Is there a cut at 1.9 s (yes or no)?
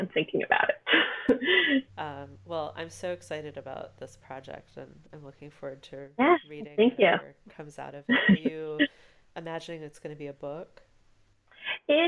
yes